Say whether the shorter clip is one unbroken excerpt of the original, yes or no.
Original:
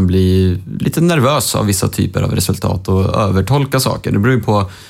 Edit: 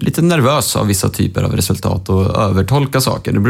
yes